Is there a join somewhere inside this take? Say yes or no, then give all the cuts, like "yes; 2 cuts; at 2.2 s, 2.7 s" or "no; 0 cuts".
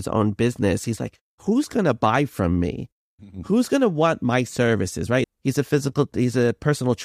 yes; 1 cut; at 5.2 s